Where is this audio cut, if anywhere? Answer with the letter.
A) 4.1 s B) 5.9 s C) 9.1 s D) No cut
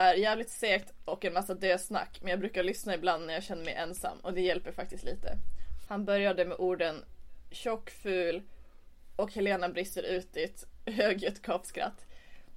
B